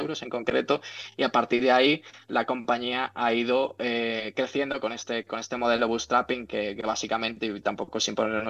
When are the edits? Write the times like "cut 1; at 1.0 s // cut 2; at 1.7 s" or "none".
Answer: none